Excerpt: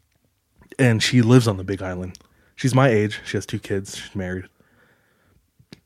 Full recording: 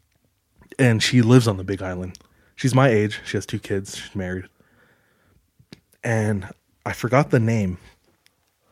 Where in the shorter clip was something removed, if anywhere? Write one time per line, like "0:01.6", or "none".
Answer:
none